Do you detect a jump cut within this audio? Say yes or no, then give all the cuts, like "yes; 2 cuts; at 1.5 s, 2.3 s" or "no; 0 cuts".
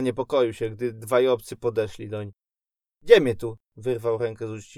no; 0 cuts